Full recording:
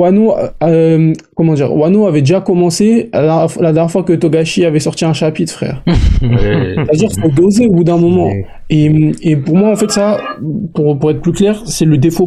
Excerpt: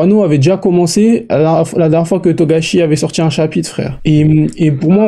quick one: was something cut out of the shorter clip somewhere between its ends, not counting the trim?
yes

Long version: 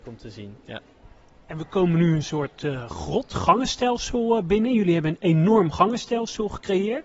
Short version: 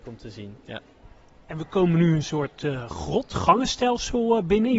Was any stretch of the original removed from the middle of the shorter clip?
no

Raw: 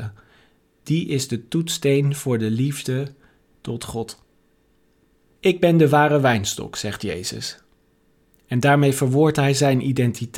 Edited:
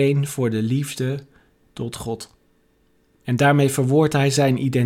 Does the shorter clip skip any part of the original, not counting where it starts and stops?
yes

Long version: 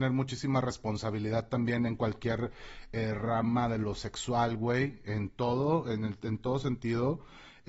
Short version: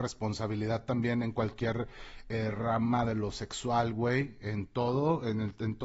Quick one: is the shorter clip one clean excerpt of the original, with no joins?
yes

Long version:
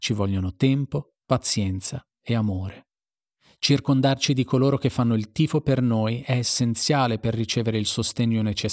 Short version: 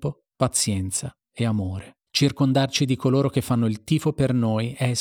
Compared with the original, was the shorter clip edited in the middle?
yes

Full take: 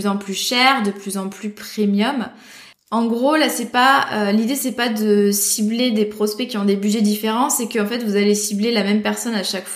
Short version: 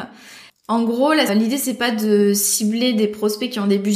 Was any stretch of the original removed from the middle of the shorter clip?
yes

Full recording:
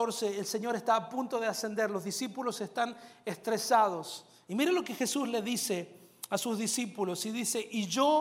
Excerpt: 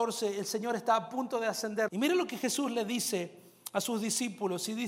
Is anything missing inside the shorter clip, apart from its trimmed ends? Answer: yes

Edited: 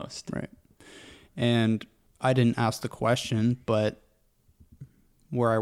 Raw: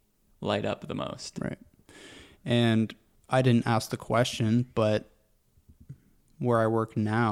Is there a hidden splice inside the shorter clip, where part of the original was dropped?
no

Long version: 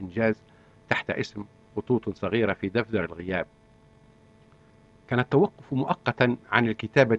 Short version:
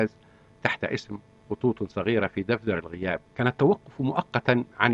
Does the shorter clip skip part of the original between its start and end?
yes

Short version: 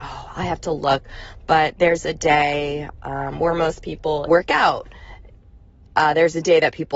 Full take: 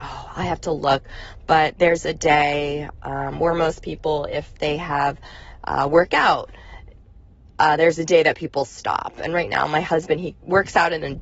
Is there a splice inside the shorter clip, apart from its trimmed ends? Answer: yes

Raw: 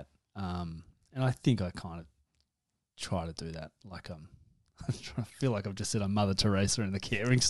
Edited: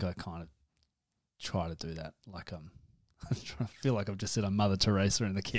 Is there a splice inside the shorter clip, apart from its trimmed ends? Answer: no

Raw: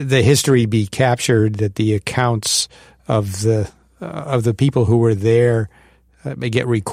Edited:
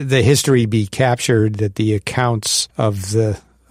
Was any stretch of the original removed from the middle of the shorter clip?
yes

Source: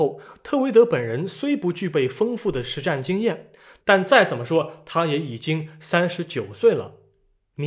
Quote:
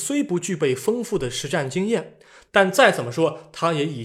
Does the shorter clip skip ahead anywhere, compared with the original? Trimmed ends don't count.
no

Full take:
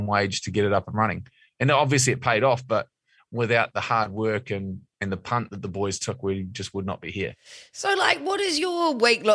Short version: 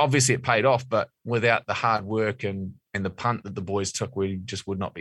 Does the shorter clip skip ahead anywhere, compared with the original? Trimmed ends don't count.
yes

